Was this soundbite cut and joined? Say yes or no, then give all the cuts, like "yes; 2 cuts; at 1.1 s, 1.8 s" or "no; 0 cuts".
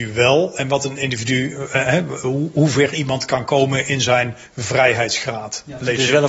no; 0 cuts